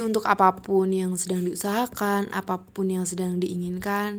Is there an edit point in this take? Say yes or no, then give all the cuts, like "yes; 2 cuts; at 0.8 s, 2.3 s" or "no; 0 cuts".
no; 0 cuts